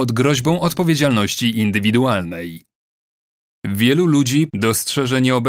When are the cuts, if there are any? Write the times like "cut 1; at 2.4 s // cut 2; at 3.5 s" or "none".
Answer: cut 1; at 4.5 s